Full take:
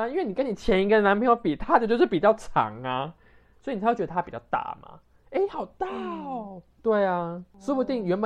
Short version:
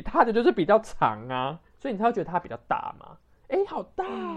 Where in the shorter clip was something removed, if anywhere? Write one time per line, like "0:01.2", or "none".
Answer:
0:01.7